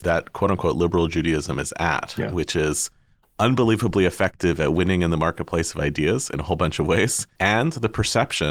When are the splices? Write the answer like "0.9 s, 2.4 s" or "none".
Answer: 7.4 s